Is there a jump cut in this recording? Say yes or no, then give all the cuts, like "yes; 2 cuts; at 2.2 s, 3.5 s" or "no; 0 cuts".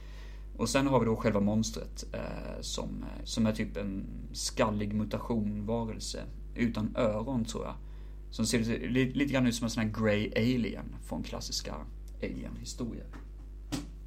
yes; 1 cut; at 3.2 s